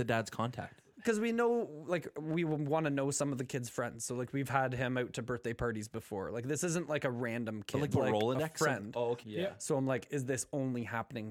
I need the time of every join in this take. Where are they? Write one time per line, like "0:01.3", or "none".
0:07.9
0:09.2